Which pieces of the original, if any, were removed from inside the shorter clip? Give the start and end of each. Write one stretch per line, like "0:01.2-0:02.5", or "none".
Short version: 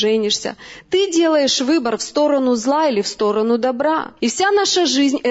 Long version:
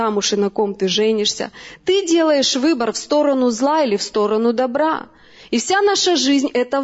0:05.1-0:05.5